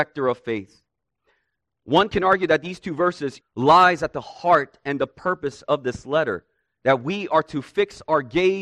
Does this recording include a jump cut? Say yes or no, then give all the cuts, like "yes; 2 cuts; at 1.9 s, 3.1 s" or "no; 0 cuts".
yes; 1 cut; at 3.4 s